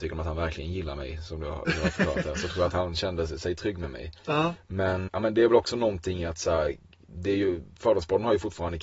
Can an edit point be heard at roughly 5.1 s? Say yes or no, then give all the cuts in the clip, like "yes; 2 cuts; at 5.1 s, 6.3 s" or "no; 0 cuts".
yes; 1 cut; at 5.1 s